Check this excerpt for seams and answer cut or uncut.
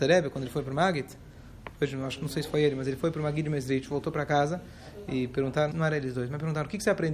cut